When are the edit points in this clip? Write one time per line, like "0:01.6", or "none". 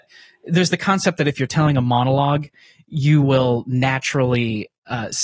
none